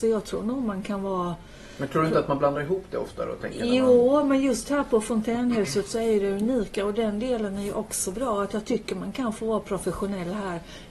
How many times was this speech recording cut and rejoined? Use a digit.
0